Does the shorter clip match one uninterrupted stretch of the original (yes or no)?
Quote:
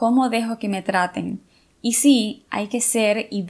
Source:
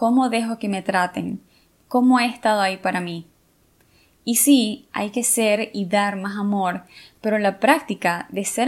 no